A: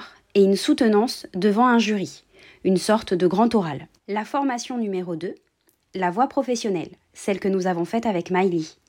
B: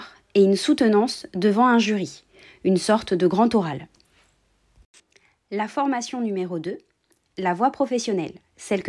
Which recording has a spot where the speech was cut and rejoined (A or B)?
A